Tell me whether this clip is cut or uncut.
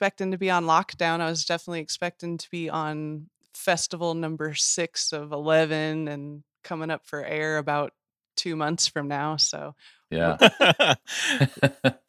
cut